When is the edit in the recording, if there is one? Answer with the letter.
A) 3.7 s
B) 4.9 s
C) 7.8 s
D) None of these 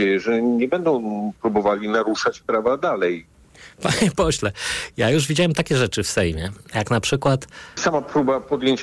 C